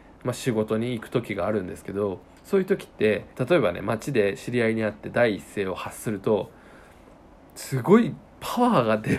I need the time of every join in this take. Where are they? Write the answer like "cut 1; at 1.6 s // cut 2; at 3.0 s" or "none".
cut 1; at 3.3 s

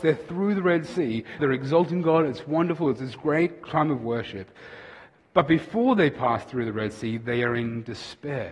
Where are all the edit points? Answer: cut 1; at 1.4 s

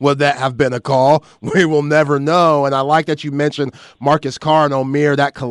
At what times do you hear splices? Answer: none

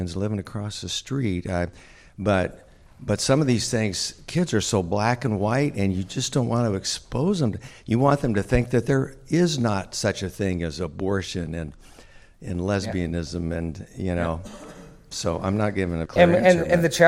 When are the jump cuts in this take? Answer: cut 1; at 16.1 s

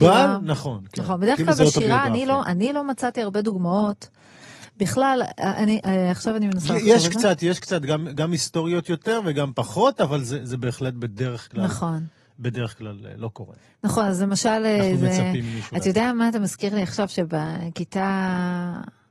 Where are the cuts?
none

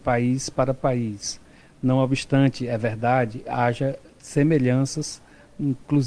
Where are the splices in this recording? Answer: none

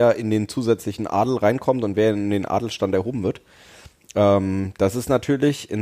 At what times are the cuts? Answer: none

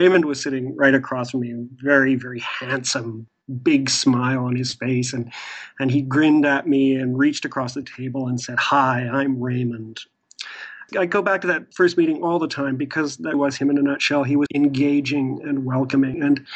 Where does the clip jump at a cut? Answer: cut 1; at 13.3 s // cut 2; at 14.5 s

